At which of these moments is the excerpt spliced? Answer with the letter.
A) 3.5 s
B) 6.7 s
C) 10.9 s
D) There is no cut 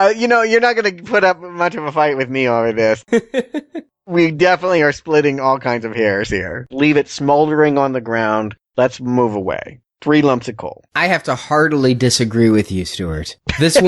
B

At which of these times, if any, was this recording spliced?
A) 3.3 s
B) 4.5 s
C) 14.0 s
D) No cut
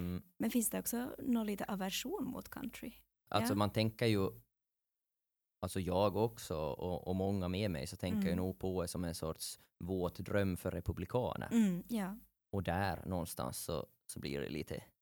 A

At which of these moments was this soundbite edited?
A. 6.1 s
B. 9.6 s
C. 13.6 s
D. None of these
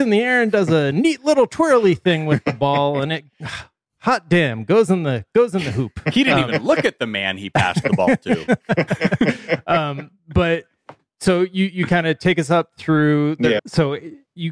C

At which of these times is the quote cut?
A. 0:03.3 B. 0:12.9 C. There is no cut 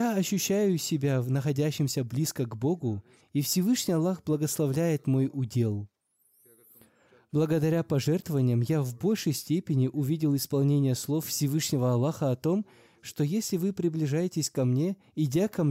A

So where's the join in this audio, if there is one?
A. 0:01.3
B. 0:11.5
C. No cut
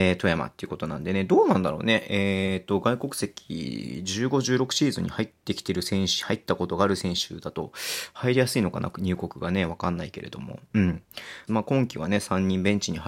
B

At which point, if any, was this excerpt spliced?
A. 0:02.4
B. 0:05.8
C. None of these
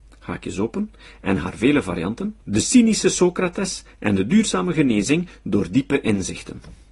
A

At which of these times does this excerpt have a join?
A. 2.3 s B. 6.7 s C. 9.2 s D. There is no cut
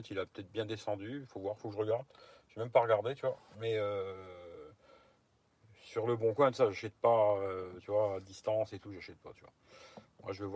D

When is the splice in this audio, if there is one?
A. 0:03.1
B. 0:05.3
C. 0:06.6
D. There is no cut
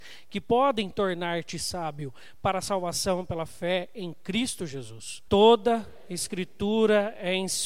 B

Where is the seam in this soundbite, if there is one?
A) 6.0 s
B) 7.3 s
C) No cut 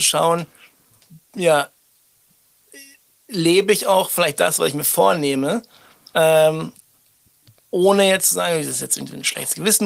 C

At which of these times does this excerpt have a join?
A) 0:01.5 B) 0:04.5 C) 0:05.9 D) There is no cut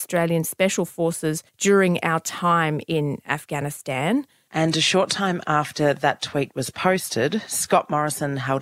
A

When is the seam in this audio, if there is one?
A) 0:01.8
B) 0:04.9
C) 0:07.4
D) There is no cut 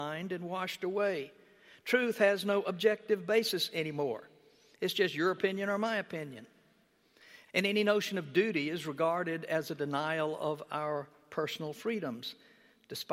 C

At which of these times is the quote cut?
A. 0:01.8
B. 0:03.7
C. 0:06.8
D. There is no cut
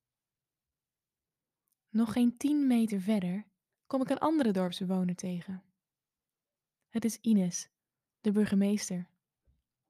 B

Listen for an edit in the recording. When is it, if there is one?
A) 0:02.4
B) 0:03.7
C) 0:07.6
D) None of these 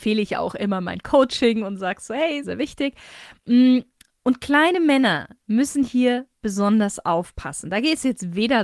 A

